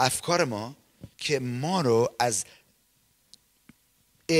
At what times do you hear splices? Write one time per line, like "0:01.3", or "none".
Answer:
0:01.1